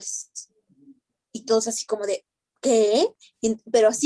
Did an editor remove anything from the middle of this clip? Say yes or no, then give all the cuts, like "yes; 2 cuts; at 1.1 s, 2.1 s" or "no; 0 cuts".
no; 0 cuts